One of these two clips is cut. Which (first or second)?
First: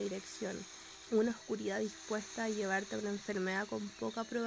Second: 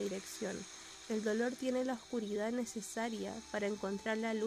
first